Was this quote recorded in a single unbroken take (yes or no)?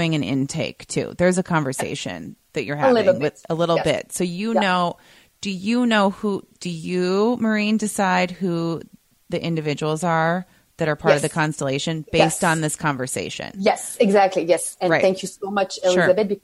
yes